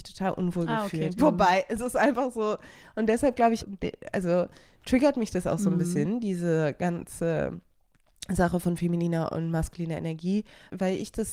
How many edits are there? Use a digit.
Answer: 2